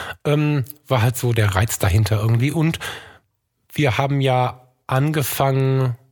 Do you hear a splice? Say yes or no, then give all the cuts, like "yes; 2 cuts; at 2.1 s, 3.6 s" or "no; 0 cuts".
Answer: no; 0 cuts